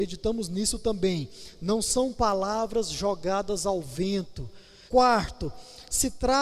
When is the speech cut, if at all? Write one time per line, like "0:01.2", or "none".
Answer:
0:04.9